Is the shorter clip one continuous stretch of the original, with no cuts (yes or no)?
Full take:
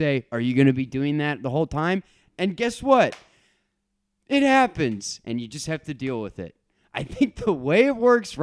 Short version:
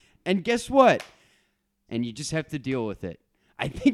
no